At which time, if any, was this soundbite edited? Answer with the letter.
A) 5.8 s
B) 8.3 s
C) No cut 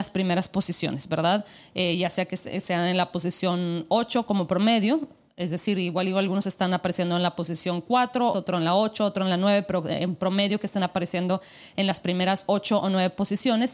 B